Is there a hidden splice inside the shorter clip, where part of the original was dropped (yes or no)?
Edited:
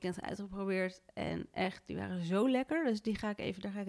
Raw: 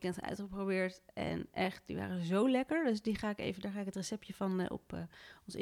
no